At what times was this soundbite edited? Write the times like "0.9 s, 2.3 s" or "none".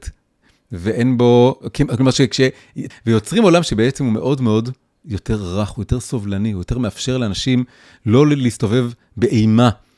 2.9 s